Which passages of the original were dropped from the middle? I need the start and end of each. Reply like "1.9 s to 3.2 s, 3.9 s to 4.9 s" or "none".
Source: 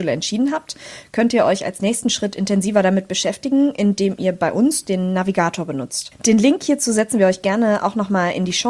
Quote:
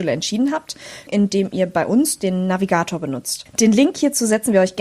1.1 s to 3.7 s